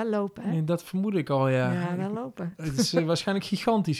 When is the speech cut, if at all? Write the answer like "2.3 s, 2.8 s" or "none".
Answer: none